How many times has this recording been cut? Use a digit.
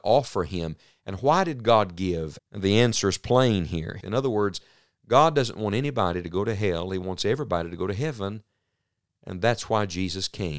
2